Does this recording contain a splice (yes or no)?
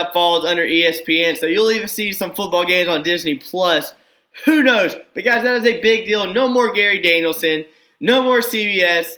no